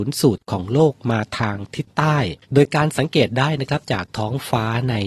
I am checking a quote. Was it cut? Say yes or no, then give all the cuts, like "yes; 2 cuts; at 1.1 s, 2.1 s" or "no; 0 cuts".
yes; 1 cut; at 2.4 s